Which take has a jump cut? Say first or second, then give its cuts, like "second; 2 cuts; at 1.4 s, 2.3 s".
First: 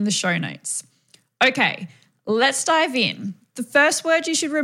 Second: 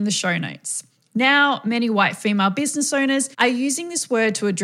second; 2 cuts; at 1.0 s, 3.3 s